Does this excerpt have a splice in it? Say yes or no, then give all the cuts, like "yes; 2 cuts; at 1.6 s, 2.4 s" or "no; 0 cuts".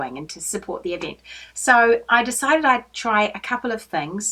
no; 0 cuts